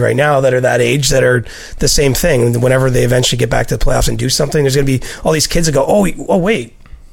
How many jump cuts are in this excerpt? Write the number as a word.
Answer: zero